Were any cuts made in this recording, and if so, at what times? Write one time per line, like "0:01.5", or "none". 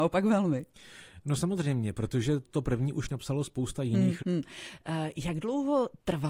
0:02.4
0:04.2